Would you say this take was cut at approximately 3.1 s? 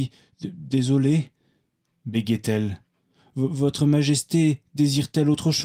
no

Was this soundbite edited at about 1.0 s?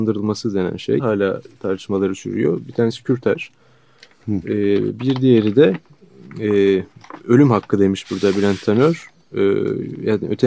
yes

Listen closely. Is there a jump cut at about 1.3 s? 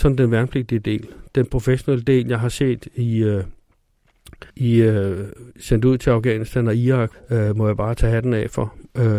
no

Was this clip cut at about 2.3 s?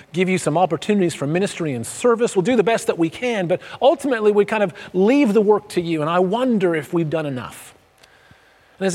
no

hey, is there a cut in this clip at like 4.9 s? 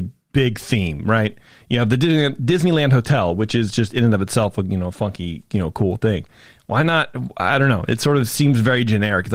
no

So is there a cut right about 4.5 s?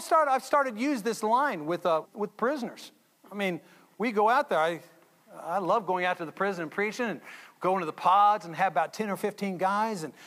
no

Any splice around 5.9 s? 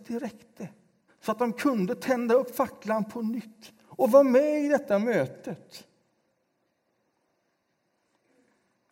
no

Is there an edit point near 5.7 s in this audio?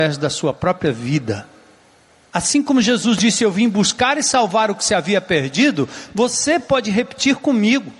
no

